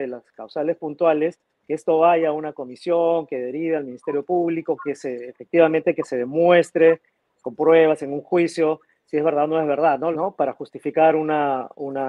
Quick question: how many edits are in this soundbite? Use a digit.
1